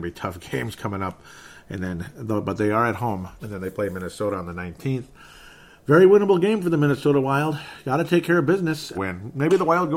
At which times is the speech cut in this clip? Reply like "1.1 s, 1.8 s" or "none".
3.4 s, 8.9 s